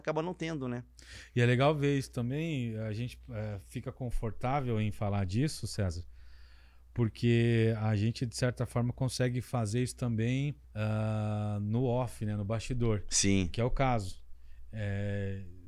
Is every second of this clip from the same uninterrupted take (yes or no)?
no